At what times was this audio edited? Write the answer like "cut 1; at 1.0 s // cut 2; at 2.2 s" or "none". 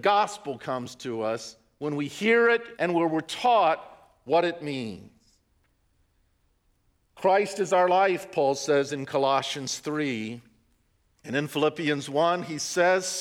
cut 1; at 2.8 s